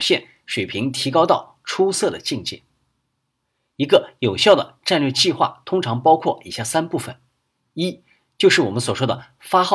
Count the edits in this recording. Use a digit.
0